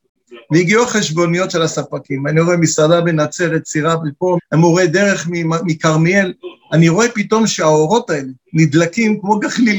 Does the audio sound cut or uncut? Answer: cut